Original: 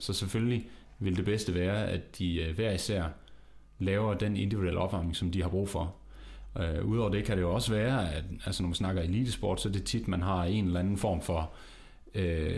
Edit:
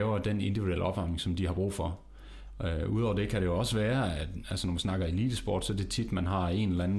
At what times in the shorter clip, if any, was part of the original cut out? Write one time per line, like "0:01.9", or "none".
none